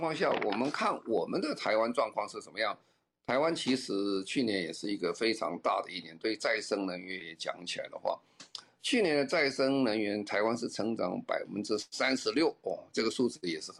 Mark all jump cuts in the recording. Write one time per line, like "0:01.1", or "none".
none